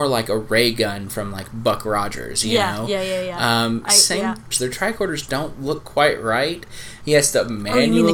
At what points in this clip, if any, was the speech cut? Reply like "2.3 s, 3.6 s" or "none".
4.5 s, 7.0 s